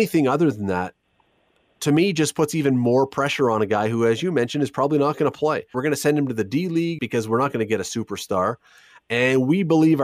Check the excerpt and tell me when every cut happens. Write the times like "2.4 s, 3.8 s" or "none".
5.7 s, 7.0 s